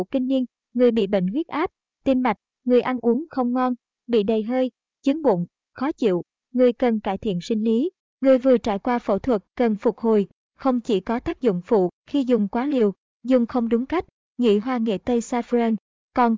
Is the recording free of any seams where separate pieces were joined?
yes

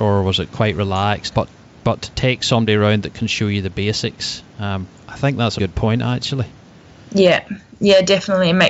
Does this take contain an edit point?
yes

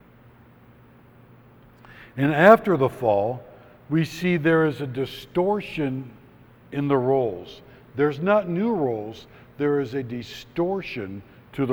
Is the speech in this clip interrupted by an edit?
no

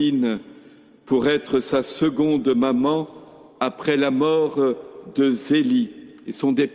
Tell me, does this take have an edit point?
no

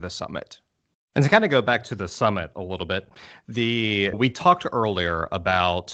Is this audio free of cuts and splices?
no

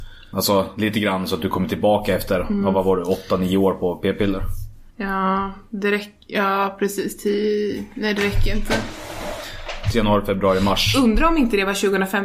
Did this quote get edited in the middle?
yes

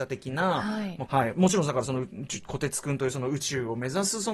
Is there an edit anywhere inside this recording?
yes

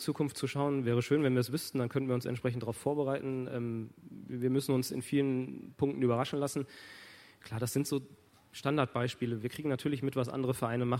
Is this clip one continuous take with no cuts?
yes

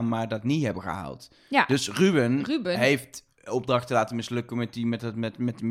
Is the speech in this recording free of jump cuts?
yes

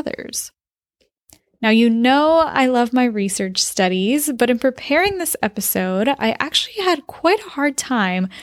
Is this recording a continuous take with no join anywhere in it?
yes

